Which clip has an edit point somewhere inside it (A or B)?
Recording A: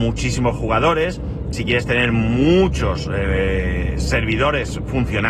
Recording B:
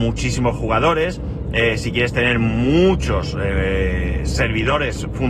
A